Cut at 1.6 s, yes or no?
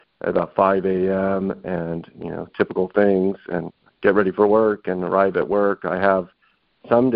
no